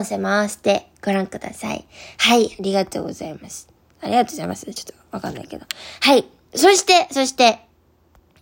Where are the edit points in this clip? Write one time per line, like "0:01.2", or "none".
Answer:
none